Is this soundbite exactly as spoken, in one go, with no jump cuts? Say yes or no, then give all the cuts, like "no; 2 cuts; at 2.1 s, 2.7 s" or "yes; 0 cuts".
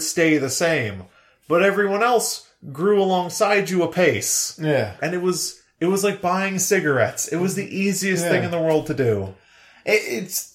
no; 1 cut; at 5.0 s